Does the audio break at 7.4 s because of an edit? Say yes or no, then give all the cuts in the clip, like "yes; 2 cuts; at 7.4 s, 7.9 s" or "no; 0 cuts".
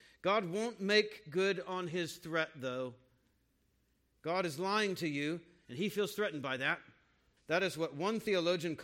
yes; 2 cuts; at 5.6 s, 7.4 s